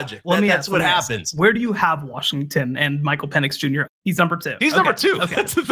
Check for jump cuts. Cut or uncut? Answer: cut